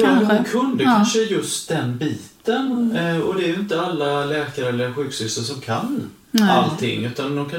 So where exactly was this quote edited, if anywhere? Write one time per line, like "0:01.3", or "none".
none